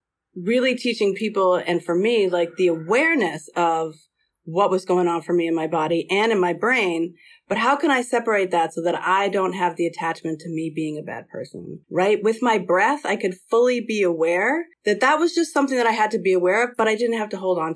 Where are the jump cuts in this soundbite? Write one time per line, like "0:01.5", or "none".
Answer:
0:11.8
0:14.7